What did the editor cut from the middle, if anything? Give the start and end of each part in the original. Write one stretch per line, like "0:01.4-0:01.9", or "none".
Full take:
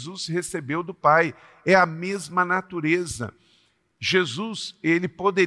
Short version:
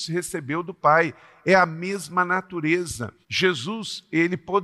0:03.4-0:03.9